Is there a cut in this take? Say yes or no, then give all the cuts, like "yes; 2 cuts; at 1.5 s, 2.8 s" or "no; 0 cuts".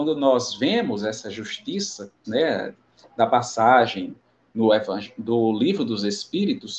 yes; 1 cut; at 2.2 s